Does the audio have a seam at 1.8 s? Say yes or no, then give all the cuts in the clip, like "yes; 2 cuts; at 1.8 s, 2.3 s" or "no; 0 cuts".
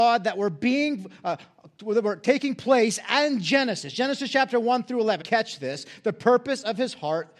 no; 1 cut; at 5.2 s